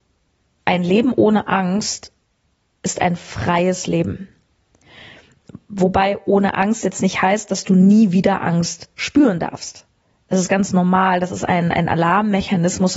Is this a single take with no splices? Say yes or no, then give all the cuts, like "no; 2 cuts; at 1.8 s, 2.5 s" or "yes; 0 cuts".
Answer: yes; 0 cuts